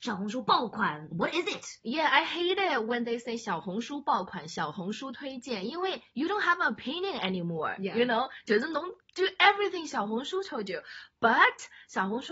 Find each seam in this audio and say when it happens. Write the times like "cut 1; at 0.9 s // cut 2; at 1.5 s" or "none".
cut 1; at 1.1 s